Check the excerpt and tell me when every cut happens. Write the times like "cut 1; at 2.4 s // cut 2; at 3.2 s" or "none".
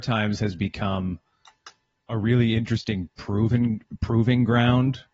none